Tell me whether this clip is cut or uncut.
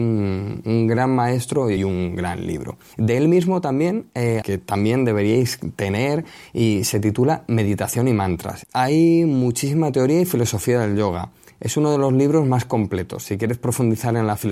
cut